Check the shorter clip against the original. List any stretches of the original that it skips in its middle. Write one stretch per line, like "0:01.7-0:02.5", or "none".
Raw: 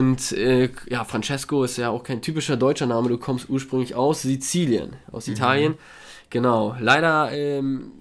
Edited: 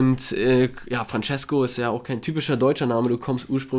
none